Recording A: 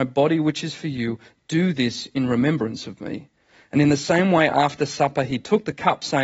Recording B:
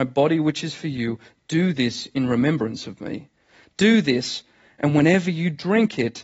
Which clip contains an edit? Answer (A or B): B